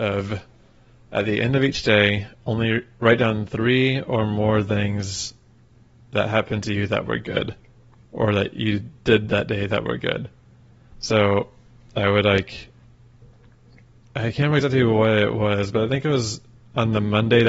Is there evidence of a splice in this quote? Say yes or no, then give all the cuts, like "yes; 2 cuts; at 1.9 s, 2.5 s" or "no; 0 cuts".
no; 0 cuts